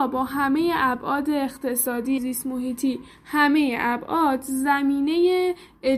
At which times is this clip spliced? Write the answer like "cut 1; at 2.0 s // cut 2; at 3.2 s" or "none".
cut 1; at 2.2 s